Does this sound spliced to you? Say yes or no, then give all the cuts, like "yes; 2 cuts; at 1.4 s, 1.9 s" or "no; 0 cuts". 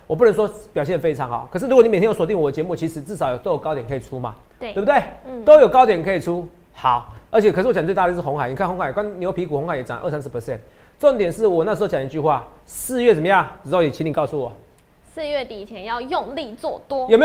no; 0 cuts